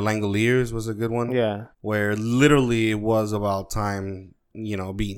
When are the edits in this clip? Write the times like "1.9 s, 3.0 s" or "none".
1.7 s